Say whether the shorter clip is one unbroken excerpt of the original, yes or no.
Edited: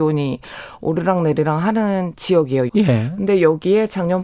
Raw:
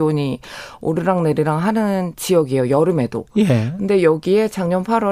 no